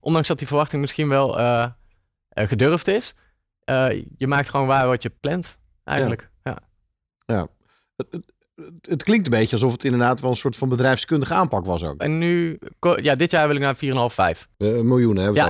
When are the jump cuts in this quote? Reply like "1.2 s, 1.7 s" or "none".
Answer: 5.2 s, 12.0 s